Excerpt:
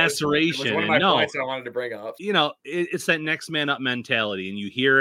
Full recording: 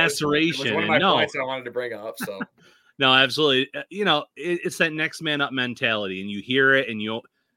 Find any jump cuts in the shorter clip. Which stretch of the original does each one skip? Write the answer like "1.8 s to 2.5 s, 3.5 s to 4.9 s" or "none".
2.1 s to 3.9 s